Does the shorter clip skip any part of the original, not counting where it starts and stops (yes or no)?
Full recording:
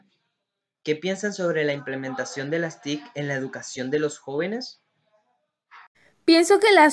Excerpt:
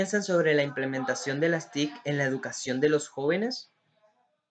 no